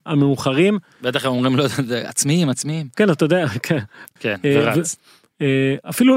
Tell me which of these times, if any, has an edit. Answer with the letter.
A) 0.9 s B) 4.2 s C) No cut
B